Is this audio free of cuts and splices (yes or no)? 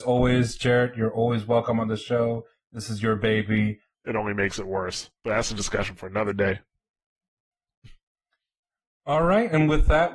no